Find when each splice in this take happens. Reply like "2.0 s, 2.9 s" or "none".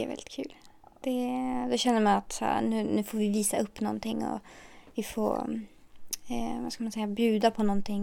none